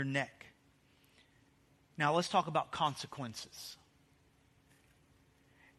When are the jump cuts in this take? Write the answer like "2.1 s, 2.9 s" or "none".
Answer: none